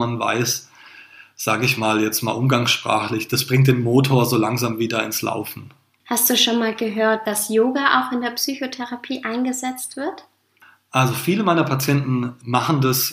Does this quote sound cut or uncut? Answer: uncut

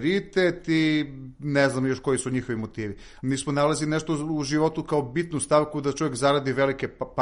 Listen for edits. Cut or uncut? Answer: cut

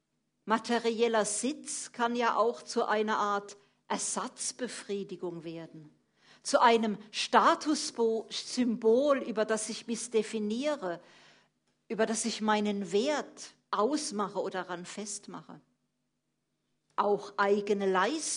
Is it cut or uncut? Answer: uncut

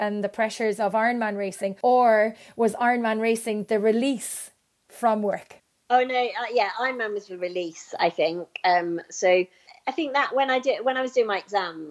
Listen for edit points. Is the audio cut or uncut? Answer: uncut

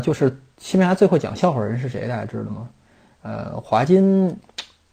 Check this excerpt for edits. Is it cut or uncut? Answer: cut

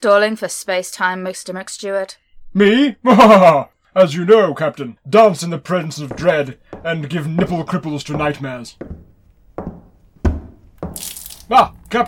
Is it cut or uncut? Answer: cut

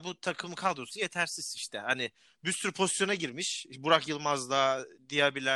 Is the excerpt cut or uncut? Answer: uncut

